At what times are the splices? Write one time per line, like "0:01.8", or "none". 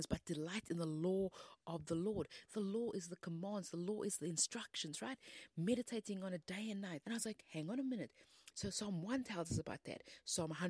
0:07.0
0:08.5